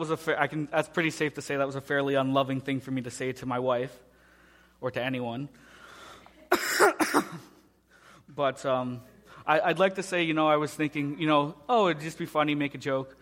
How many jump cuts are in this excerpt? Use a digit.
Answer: 0